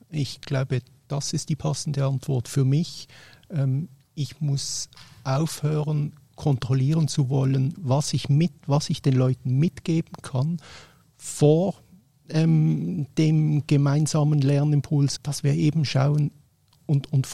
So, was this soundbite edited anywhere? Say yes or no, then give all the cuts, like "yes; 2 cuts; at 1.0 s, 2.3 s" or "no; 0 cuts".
yes; 2 cuts; at 7.8 s, 15.2 s